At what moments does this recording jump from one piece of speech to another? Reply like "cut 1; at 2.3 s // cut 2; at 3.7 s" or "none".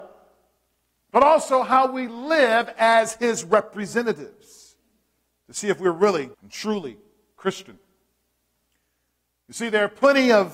cut 1; at 6.3 s